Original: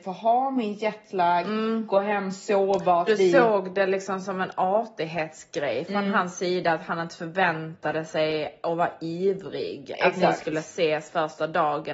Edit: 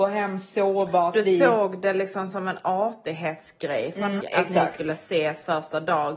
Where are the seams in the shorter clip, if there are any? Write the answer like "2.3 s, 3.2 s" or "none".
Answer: 4.2 s